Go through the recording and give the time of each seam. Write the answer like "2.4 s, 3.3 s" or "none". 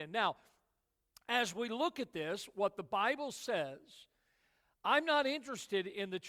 none